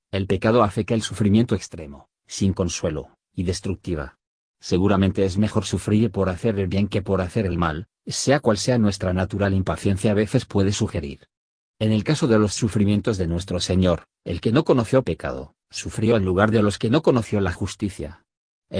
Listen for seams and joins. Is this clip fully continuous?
no; 1 cut; at 11.6 s

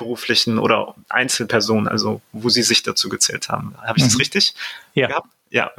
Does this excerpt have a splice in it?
no; 0 cuts

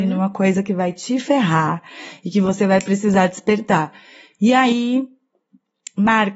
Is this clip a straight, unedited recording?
yes; 0 cuts

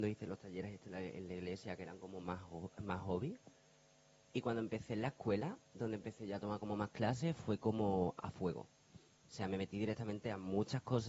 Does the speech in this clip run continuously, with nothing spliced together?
yes; 0 cuts

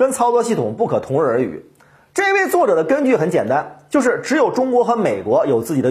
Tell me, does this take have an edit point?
no; 0 cuts

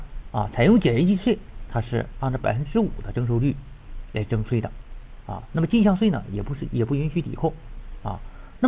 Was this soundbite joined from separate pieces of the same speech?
no; 0 cuts

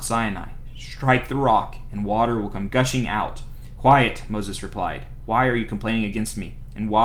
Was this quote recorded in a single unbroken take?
no; 2 cuts; at 2.7 s, 3.8 s

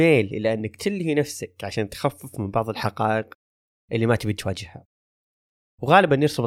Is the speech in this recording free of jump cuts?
yes; 0 cuts

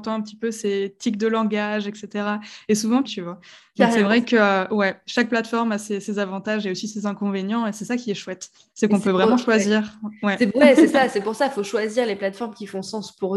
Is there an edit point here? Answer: yes; 1 cut; at 3.1 s

